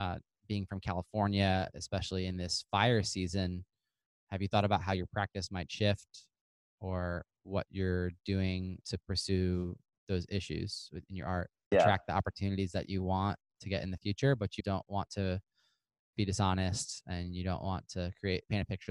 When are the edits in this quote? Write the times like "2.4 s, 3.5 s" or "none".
8.8 s, 11.7 s, 14.6 s